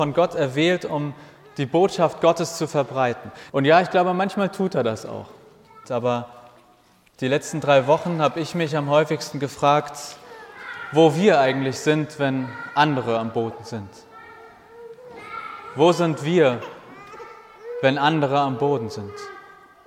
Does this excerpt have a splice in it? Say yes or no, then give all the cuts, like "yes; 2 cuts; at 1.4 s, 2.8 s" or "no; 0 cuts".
yes; 2 cuts; at 3.5 s, 5.8 s